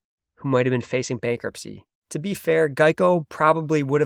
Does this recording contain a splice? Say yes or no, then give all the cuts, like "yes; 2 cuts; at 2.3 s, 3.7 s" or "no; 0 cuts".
yes; 1 cut; at 2.0 s